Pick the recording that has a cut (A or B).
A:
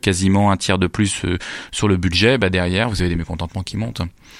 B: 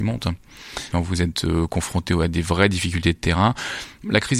B